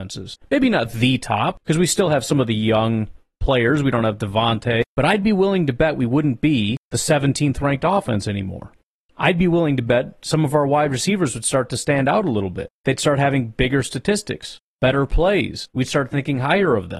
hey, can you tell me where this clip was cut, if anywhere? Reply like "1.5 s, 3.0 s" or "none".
none